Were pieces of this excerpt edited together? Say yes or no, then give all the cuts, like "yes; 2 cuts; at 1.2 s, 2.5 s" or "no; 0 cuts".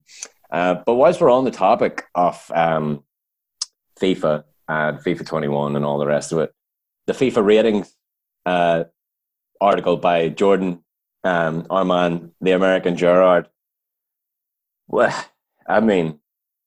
yes; 1 cut; at 7.0 s